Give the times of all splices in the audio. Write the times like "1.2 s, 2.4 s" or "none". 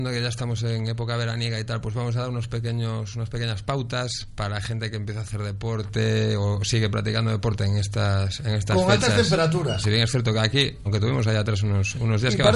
9.8 s, 10.9 s